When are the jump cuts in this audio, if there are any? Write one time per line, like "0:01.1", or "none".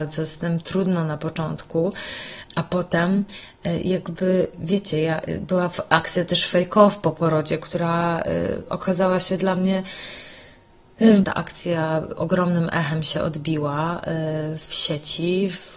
0:11.2